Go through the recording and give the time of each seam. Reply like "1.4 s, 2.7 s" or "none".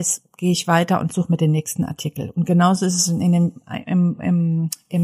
none